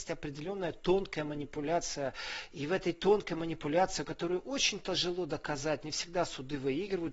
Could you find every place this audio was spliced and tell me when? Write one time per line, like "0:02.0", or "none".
none